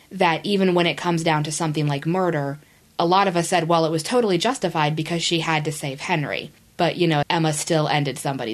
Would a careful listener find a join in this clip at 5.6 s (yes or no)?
no